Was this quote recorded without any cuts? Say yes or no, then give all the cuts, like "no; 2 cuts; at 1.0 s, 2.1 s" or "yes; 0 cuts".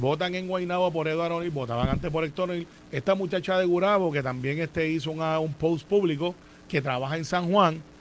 no; 1 cut; at 2.8 s